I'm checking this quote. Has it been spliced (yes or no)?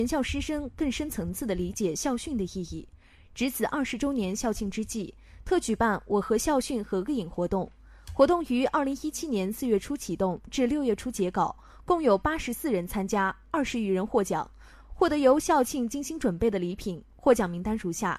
no